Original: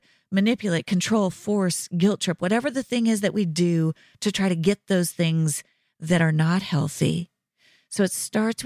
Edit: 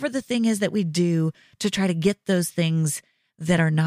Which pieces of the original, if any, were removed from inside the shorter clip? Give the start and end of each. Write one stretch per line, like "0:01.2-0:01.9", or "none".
none